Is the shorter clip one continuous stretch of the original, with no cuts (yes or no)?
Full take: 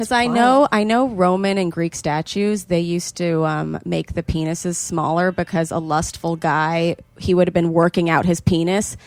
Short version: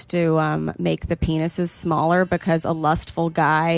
yes